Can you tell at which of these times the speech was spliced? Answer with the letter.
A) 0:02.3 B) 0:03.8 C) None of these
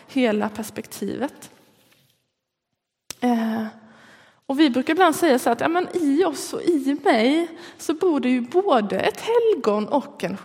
C